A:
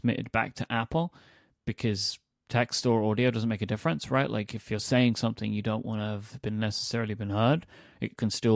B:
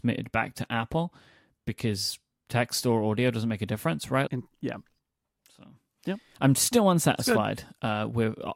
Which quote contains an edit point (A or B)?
B